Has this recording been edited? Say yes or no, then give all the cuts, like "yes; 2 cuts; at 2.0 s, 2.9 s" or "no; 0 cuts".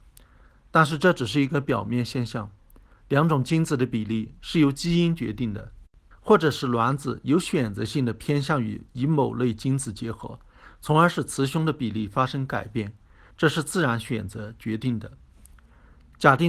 yes; 2 cuts; at 6.1 s, 13.3 s